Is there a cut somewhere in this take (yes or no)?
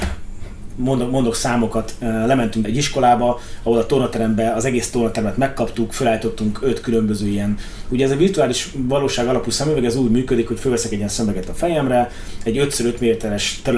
yes